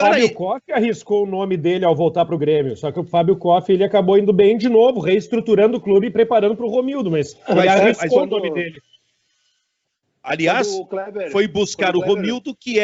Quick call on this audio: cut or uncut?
uncut